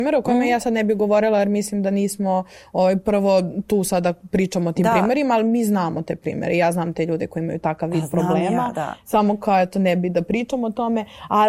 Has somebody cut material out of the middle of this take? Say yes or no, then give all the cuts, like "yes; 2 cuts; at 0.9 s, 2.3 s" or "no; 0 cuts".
no; 0 cuts